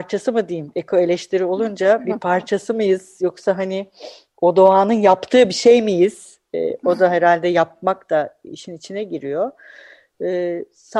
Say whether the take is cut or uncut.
uncut